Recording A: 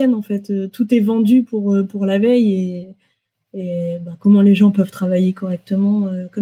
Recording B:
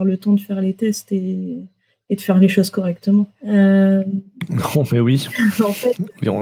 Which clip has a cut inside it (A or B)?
B